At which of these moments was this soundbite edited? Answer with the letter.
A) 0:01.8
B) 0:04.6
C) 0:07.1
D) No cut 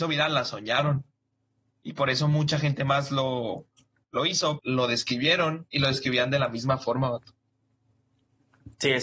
B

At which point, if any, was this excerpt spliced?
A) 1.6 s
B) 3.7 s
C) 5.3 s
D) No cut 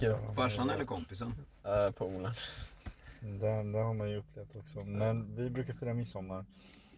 D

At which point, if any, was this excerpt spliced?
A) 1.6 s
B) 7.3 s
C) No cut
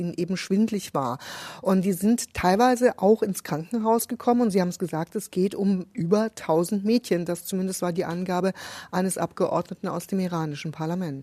C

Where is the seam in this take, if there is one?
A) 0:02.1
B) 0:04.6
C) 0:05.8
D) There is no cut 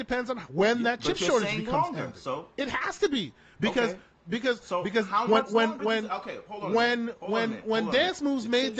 C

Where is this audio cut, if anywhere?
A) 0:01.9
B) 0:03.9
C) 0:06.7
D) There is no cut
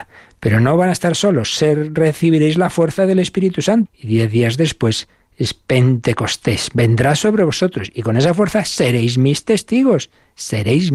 B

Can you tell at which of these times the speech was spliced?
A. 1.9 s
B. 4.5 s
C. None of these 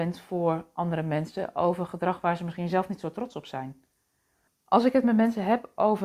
B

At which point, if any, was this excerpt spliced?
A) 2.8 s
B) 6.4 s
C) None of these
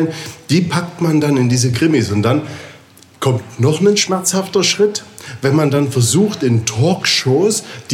C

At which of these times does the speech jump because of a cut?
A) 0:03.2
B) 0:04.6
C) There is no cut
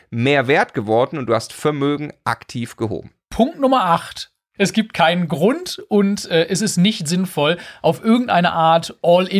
B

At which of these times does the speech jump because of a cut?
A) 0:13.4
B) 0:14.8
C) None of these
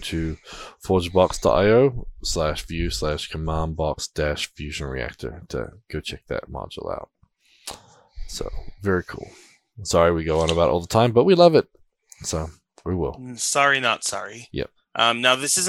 B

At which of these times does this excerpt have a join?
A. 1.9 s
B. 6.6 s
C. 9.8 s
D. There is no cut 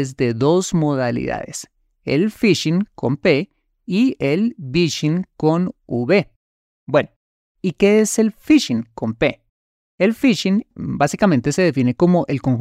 D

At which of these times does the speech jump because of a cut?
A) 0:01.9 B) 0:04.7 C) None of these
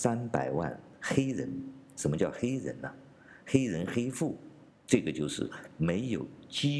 B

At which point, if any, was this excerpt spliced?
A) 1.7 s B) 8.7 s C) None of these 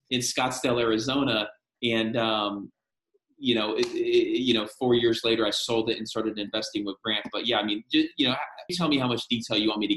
B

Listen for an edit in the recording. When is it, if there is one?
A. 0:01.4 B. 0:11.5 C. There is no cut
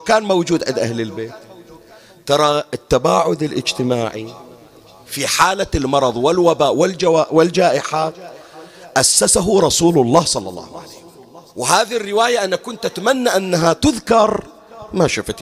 B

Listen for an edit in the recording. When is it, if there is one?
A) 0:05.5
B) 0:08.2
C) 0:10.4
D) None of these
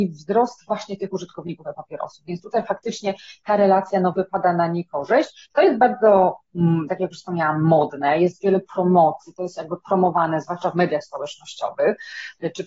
A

